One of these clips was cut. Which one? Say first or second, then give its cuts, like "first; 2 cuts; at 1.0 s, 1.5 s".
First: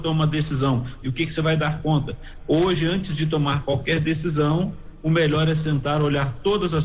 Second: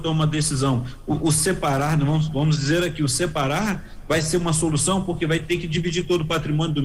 first; 1 cut; at 1.0 s